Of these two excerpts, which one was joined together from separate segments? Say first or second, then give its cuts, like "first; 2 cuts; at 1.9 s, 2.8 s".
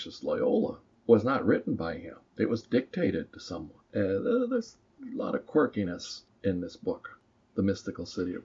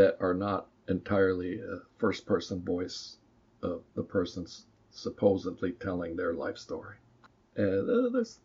first; 2 cuts; at 2.3 s, 3.8 s